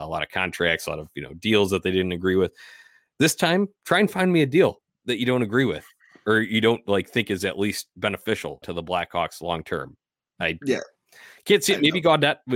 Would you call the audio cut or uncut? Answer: cut